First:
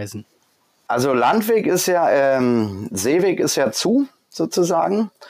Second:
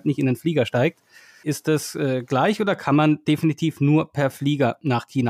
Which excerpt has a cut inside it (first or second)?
second